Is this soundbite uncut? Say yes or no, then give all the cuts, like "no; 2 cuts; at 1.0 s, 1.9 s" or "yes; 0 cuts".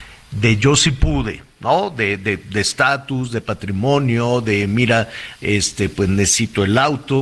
yes; 0 cuts